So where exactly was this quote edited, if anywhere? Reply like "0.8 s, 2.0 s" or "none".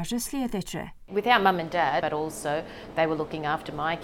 2.0 s